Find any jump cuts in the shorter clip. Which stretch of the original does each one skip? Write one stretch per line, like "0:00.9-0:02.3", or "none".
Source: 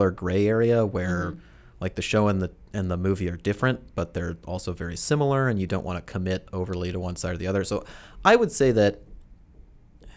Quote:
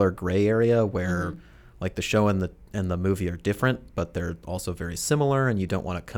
none